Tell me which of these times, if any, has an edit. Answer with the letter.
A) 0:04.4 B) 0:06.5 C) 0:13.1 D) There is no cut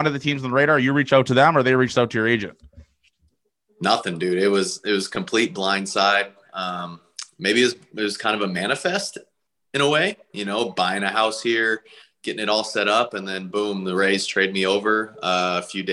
D